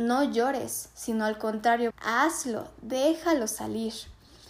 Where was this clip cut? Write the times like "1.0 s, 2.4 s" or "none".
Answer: 1.9 s